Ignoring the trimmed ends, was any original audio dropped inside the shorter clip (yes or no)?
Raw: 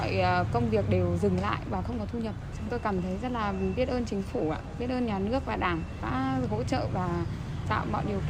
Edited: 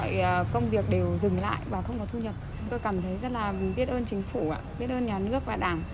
no